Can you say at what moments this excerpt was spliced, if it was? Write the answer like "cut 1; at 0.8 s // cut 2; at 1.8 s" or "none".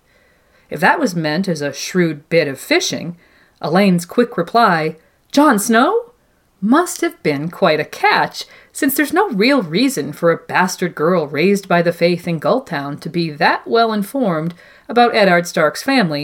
none